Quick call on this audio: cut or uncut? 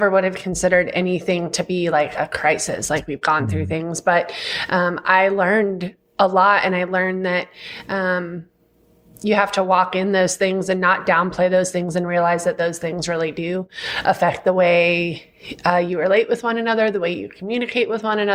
uncut